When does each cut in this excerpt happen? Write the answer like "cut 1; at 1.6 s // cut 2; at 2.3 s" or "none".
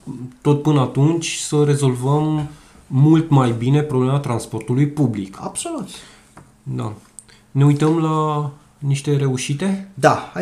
none